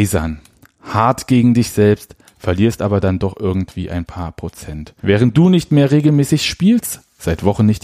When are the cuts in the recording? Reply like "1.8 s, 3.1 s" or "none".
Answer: 5.0 s